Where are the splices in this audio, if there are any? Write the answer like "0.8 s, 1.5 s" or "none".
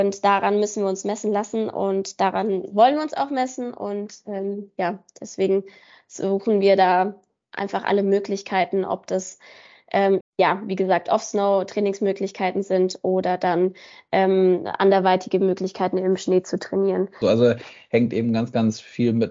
10.2 s, 17.2 s